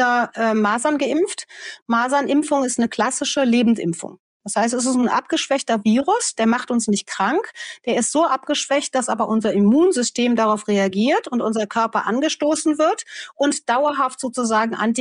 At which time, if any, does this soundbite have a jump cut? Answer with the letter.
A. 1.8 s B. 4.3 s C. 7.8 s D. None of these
D